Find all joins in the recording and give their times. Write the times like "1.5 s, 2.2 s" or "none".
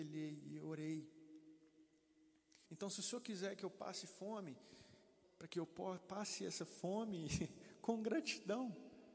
2.7 s, 5.2 s